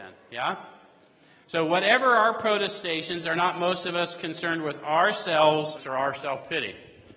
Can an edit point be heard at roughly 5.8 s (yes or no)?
yes